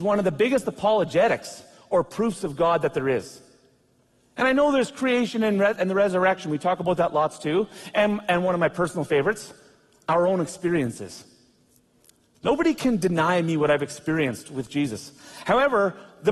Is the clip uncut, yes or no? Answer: yes